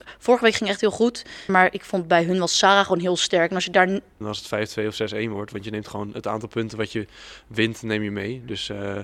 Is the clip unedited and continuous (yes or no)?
no